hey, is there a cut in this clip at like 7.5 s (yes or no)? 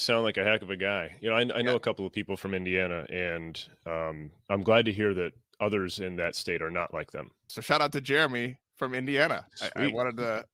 yes